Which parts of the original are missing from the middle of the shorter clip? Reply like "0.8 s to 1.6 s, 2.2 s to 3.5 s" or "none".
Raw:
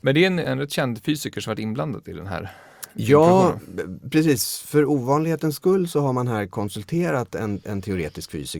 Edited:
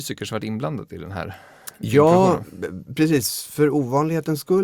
none